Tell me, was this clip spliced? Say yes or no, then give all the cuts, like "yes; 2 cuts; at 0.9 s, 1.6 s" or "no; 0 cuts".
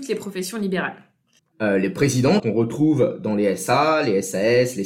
yes; 2 cuts; at 1.4 s, 2.4 s